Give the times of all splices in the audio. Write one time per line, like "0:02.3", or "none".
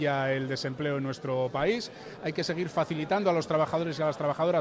0:02.2